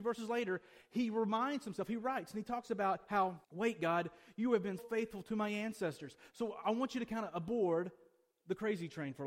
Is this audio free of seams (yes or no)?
no